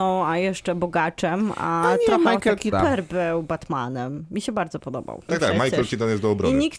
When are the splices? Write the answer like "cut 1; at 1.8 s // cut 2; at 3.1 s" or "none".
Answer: cut 1; at 2.7 s // cut 2; at 5.3 s